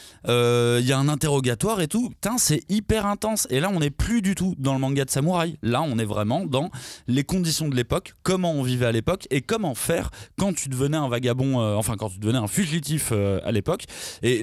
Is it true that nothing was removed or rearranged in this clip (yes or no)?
yes